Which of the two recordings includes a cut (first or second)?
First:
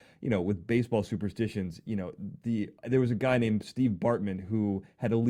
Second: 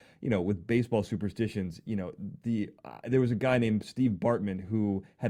first